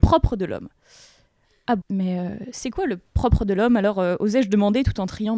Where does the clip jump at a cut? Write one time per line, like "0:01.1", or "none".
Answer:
0:01.8